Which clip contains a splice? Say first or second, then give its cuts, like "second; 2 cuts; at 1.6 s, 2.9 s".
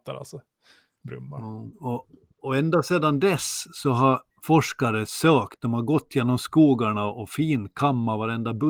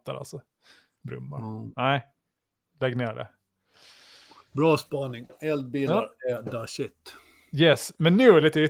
first; 2 cuts; at 1.7 s, 4.3 s